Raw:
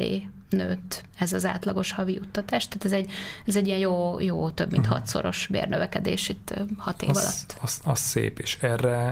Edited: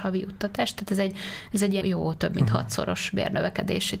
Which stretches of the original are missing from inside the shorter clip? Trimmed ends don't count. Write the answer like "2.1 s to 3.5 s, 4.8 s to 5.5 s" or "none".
3.7 s to 4.2 s